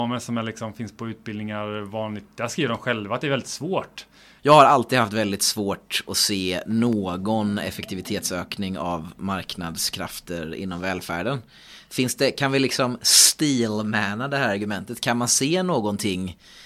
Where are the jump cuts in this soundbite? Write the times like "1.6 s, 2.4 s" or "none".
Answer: 4.4 s